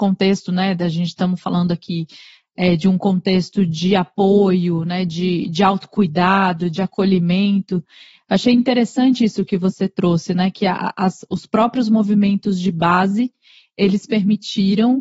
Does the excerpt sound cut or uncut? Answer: uncut